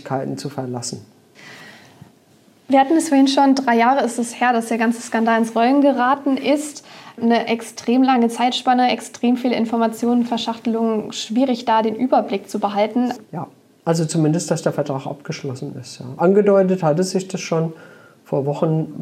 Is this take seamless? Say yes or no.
no